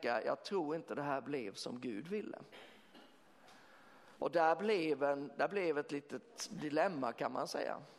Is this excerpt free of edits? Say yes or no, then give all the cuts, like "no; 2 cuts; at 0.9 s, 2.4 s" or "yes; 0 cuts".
no; 1 cut; at 4.2 s